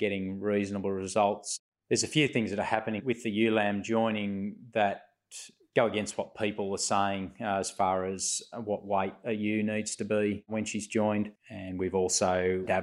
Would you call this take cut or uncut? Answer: cut